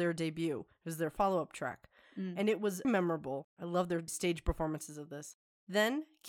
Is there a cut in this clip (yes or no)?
yes